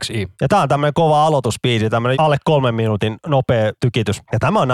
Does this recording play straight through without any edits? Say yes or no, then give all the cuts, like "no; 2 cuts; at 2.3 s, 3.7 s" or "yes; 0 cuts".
no; 1 cut; at 2.1 s